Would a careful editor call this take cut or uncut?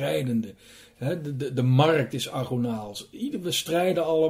uncut